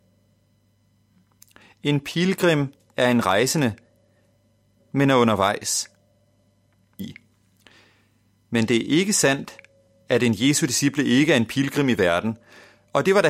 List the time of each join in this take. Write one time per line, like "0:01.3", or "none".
0:04.8
0:07.0